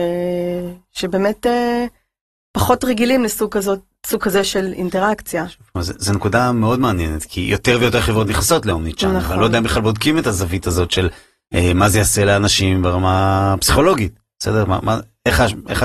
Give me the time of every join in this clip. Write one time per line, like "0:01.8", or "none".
none